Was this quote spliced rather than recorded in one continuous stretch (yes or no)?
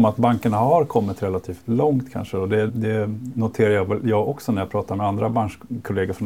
yes